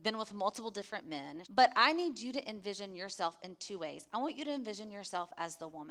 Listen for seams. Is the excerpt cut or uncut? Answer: cut